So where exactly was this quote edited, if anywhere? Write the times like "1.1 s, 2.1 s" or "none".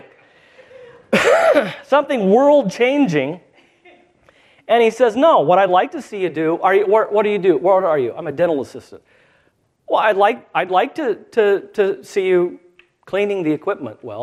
none

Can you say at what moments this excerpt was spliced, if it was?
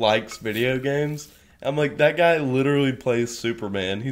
none

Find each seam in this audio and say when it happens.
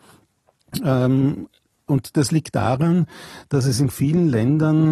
none

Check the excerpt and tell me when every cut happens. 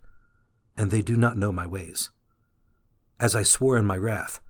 none

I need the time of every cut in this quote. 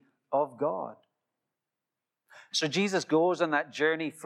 2.5 s

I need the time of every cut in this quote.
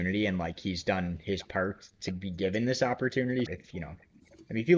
3.5 s

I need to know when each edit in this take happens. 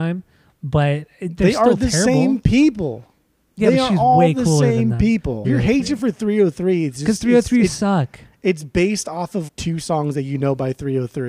5.4 s, 9.5 s

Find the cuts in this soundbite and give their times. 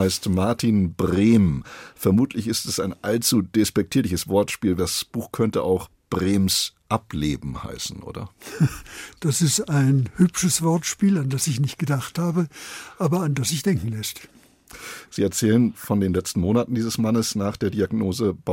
4.8 s

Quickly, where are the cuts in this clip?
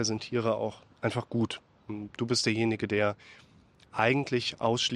none

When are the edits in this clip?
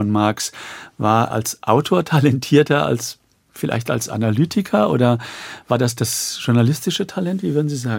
1.3 s

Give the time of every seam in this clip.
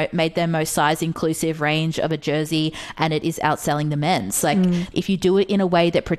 4.9 s

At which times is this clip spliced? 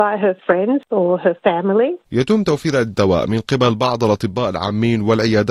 2.0 s

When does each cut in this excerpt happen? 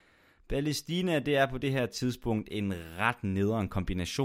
none

